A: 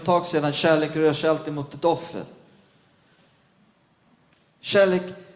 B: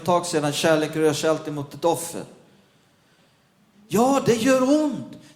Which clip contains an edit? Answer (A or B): B